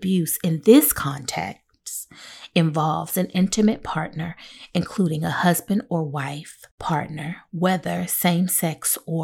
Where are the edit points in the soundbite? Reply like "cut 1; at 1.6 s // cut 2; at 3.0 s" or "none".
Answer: none